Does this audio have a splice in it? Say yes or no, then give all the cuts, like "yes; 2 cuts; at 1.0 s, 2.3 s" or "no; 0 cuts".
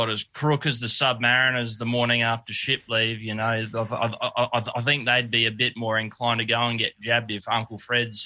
no; 0 cuts